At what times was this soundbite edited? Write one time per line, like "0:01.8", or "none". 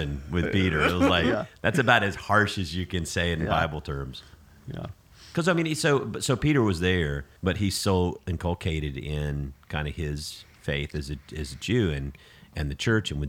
0:07.4